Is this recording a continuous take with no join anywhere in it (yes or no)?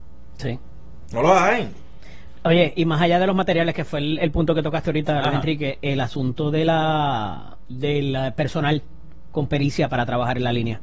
yes